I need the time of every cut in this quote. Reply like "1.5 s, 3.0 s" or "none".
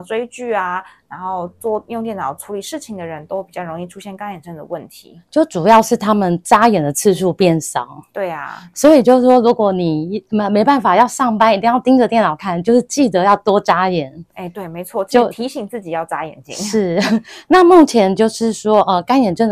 none